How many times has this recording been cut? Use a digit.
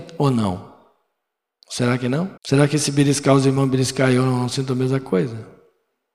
1